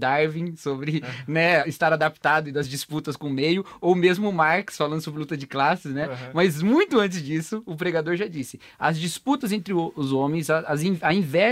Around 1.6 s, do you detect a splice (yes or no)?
yes